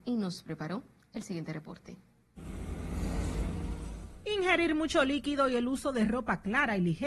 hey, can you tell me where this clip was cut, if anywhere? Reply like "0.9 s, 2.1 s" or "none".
none